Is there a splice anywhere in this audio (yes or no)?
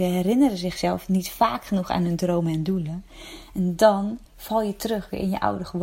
yes